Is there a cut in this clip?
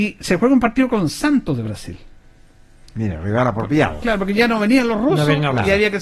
no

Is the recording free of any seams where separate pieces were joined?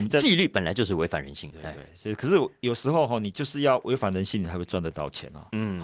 no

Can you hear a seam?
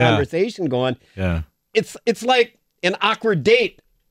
no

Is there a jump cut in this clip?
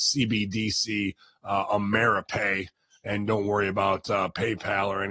no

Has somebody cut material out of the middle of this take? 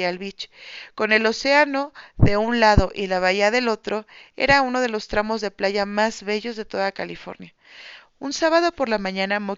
no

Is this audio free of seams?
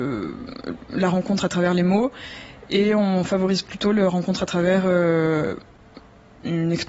yes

